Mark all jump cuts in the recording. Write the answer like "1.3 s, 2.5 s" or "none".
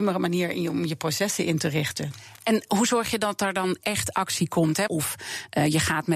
4.9 s